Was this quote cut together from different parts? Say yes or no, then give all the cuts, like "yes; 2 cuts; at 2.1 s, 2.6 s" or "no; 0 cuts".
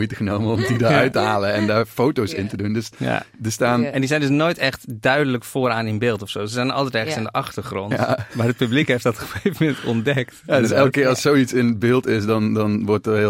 no; 0 cuts